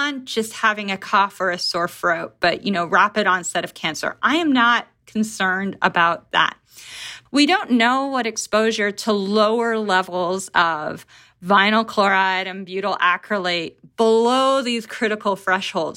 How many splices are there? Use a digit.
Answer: 1